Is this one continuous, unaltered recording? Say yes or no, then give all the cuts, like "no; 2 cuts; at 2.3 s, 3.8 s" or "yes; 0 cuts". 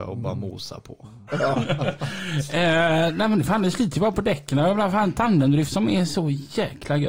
no; 1 cut; at 1.3 s